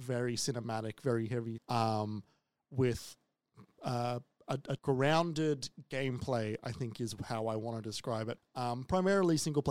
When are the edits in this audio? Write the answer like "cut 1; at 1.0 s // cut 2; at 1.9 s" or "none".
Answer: cut 1; at 1.6 s // cut 2; at 4.8 s // cut 3; at 8.4 s